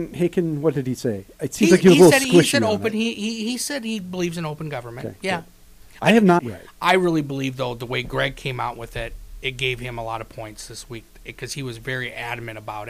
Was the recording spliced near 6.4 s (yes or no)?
yes